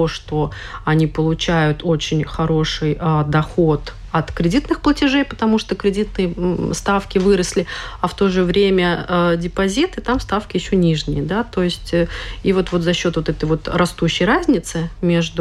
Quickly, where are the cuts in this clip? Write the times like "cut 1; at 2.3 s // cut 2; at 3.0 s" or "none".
none